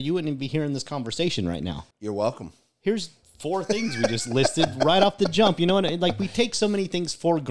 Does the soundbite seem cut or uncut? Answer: cut